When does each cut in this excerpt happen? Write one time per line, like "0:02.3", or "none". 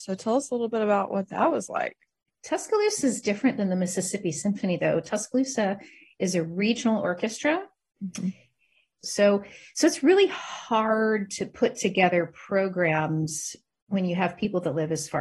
0:02.3
0:09.0

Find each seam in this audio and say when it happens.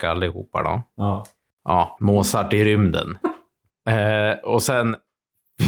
0:02.0
0:03.2

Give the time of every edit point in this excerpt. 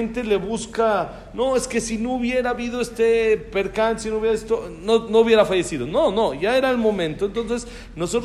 none

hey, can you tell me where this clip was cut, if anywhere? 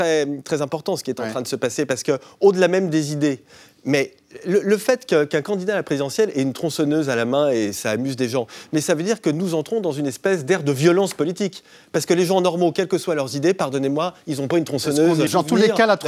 none

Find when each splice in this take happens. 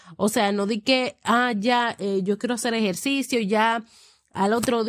none

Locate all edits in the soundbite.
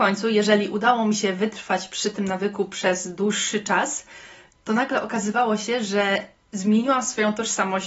none

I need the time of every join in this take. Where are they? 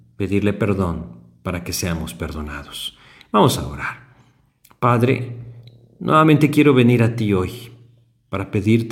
none

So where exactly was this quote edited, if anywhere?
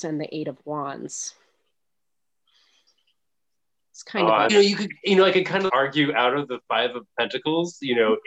0:04.5
0:05.7

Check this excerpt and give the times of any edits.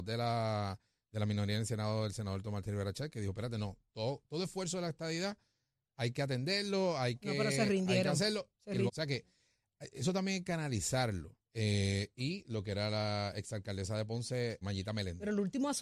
0:08.9
0:11.4
0:14.6

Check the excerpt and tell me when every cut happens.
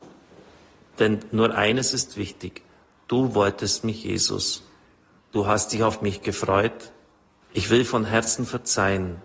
0:05.2
0:07.4

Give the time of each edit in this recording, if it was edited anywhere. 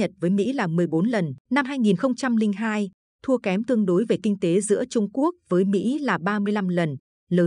0:01.4

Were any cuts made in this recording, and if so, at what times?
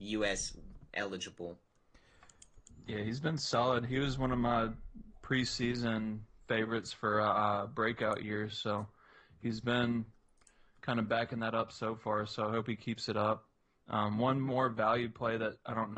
none

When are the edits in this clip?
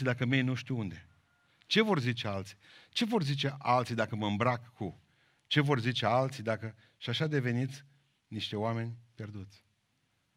none

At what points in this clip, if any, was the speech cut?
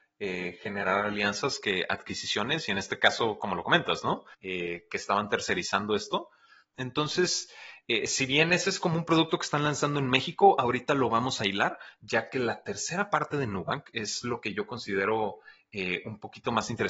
0:04.3
0:06.7

